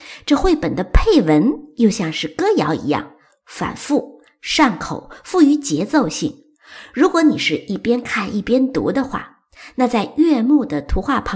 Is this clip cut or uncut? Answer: uncut